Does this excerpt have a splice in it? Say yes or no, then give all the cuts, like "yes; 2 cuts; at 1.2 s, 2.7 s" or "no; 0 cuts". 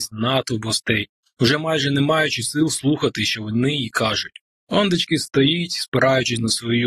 no; 0 cuts